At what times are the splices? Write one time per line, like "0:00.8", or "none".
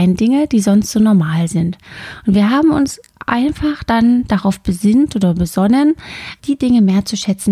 0:06.4